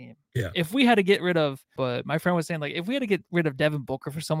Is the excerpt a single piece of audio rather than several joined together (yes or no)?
no